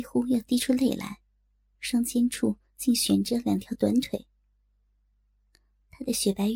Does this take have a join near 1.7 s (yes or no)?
yes